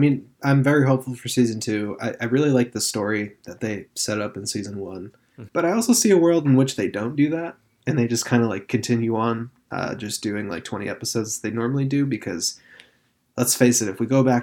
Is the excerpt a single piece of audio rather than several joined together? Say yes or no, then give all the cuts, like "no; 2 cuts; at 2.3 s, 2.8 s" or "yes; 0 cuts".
no; 1 cut; at 5.5 s